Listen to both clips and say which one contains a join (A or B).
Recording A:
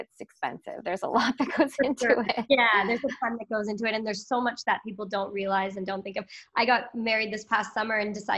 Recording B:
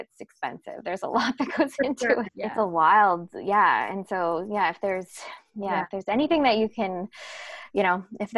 B